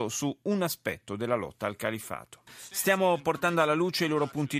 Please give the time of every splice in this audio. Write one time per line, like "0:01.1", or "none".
0:02.5